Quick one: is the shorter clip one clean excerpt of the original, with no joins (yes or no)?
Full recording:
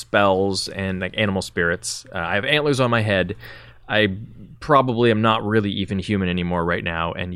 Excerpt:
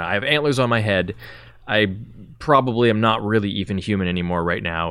yes